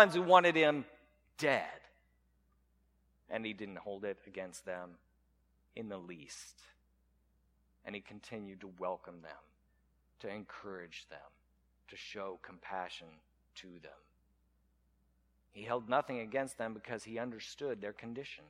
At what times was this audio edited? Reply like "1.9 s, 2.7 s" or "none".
none

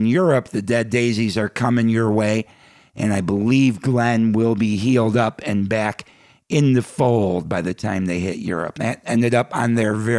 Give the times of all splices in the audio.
8.7 s

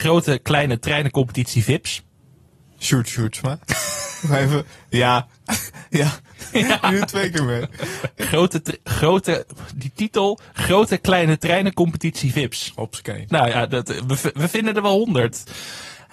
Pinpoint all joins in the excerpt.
6.5 s, 8.2 s, 13.3 s

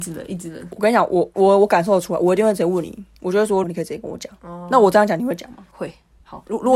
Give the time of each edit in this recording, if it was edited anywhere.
3.6 s

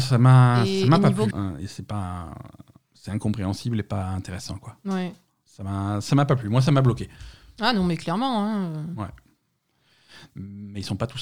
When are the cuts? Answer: 1.3 s, 10.3 s

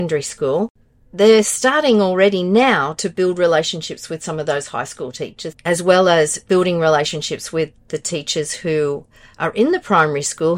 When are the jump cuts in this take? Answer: 5.5 s

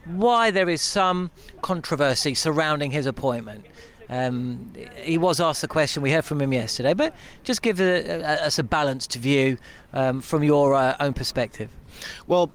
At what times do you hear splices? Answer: none

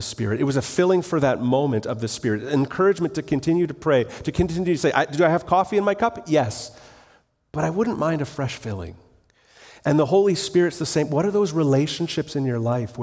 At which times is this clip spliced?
none

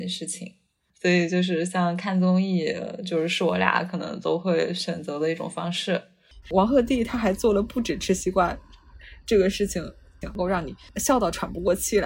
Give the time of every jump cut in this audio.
6.4 s, 10.2 s

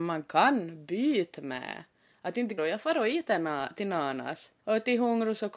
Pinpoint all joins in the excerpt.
2.6 s

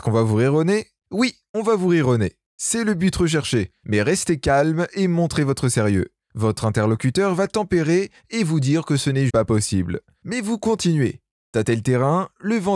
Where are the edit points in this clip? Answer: 9.3 s

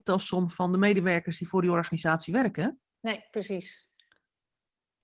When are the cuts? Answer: none

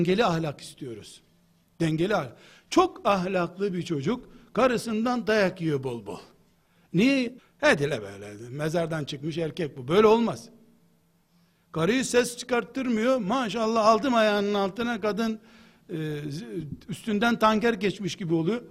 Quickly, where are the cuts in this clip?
7.4 s

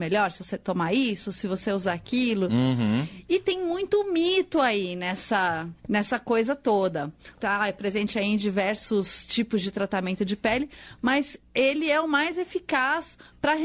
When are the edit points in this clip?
5.8 s, 7.3 s

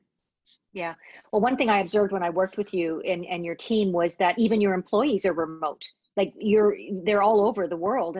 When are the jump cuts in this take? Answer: none

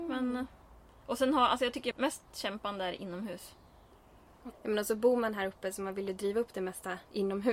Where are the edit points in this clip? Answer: 1.9 s, 4.5 s

